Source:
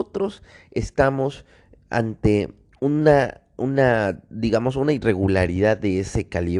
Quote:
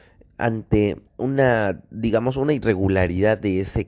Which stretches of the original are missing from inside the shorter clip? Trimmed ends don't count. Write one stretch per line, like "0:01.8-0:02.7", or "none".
0:02.6-0:03.5